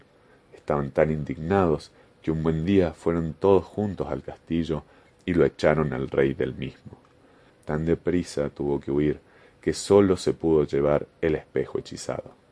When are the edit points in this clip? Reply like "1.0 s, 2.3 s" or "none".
7.5 s